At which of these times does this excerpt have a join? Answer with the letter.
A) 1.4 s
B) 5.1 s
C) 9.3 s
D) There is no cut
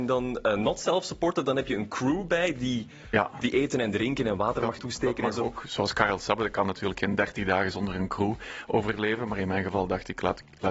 D